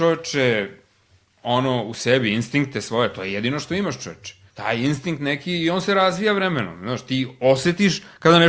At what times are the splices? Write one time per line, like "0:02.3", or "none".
0:04.5